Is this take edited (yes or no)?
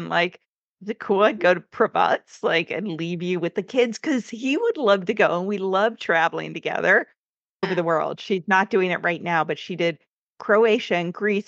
yes